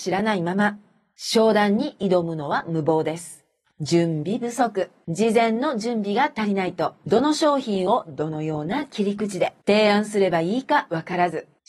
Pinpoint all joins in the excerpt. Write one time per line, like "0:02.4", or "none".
0:03.7